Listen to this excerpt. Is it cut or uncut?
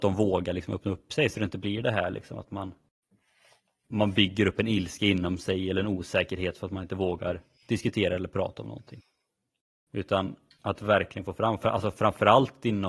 uncut